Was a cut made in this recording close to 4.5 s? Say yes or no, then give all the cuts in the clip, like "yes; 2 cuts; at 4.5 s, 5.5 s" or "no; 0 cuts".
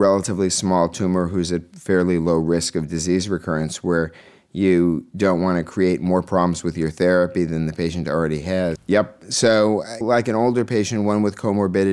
no; 2 cuts; at 8.8 s, 10.0 s